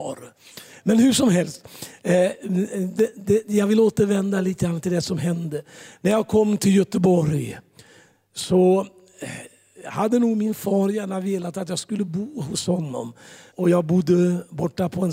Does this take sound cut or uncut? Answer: cut